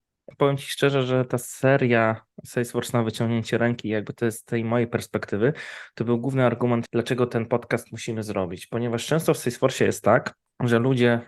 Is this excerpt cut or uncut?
uncut